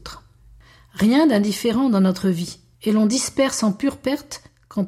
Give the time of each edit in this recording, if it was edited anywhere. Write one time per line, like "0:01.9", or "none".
0:02.7